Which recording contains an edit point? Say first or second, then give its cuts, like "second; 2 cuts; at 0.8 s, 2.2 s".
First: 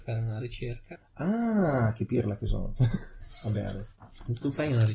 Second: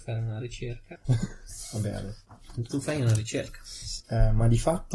second; 2 cuts; at 1.0 s, 4.0 s